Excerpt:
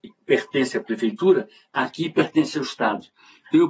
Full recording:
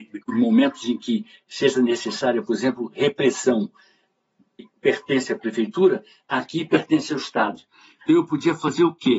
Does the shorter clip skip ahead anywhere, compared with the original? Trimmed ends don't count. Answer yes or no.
no